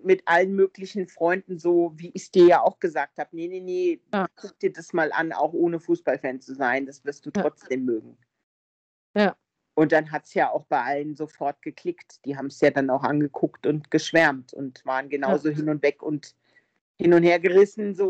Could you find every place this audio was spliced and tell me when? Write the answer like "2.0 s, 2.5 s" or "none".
none